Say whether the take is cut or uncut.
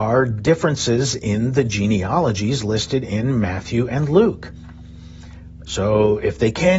cut